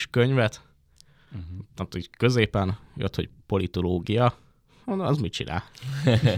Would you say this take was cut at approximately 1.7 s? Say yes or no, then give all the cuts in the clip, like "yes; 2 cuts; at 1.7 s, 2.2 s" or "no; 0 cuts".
no; 0 cuts